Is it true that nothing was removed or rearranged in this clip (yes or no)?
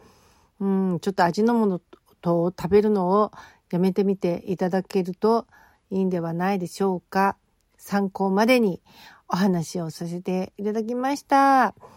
yes